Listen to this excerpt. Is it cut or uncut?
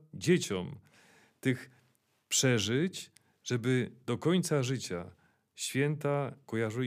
uncut